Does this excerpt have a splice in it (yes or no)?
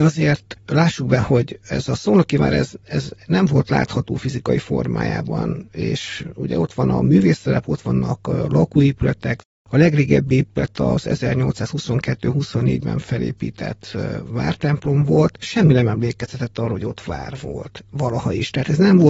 no